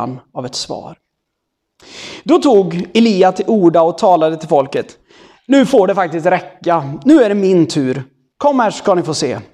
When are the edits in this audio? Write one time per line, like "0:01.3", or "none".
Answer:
none